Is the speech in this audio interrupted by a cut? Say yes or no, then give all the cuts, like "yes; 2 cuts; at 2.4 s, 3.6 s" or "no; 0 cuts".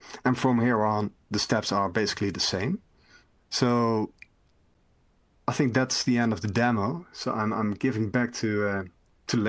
yes; 1 cut; at 3.4 s